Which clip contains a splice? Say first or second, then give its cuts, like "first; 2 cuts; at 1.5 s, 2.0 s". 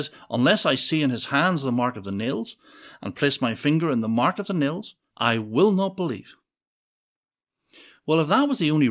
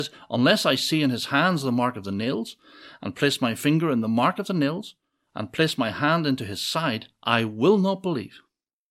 first; 1 cut; at 5.1 s